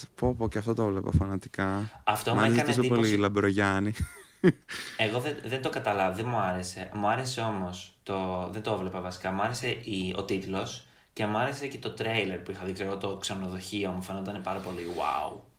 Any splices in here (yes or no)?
no